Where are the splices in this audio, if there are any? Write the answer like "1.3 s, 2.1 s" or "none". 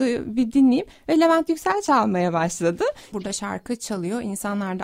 3.1 s